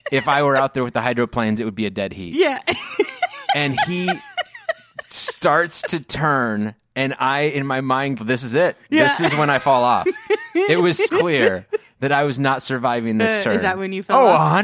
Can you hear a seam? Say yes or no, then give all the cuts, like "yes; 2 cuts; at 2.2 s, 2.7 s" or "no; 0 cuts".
yes; 2 cuts; at 8.2 s, 11.1 s